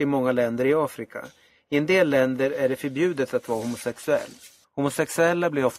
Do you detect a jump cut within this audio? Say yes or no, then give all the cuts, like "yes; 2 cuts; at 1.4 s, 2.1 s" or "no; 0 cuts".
yes; 1 cut; at 4.6 s